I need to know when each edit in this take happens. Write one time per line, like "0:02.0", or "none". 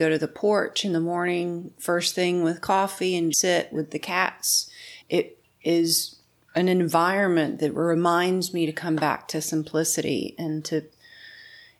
0:03.3
0:05.0